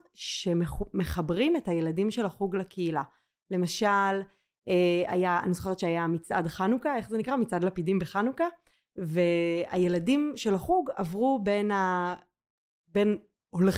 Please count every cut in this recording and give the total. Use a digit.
0